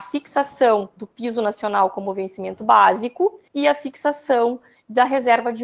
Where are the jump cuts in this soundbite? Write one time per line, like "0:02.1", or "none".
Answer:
0:03.5